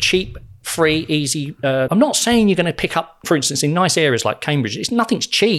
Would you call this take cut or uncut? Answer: cut